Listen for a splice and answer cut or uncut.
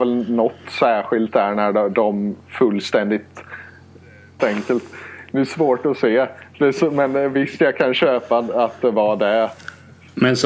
cut